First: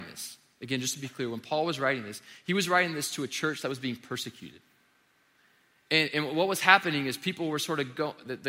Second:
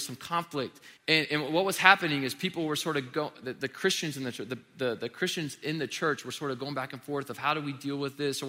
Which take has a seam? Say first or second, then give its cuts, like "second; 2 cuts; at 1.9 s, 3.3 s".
second; 1 cut; at 1.0 s